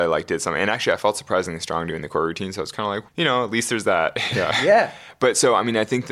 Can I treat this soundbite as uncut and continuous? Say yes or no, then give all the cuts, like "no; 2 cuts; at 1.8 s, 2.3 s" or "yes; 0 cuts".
no; 1 cut; at 3.1 s